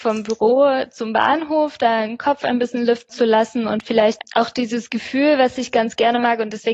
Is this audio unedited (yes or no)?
yes